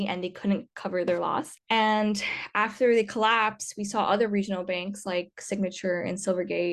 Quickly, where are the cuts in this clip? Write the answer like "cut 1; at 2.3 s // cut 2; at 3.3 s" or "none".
cut 1; at 1.6 s